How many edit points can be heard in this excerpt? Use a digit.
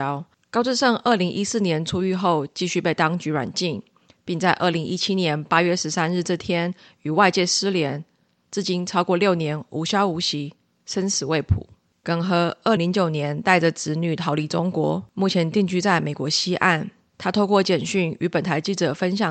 1